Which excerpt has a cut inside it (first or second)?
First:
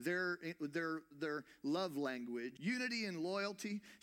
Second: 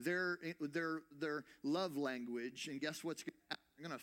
first